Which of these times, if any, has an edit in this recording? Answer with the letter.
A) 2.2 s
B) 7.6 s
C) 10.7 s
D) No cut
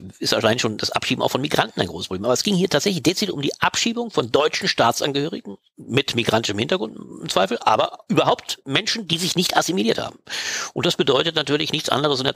D